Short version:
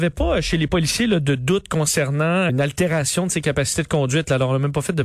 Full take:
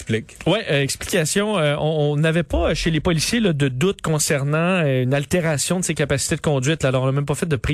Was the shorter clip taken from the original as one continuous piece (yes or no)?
no